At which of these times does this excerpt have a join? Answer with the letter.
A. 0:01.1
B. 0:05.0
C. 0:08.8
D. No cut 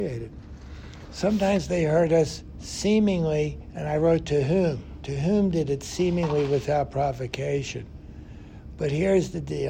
D